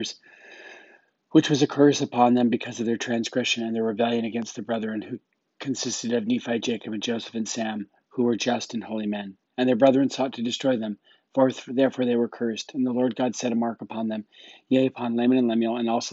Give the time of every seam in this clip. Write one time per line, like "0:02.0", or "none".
none